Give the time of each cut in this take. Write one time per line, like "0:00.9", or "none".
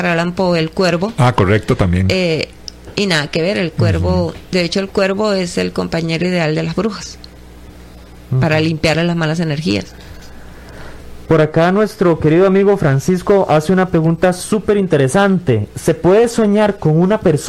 none